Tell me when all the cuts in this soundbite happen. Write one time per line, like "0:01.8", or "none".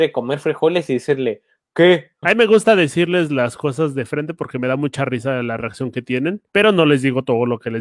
0:02.2
0:06.5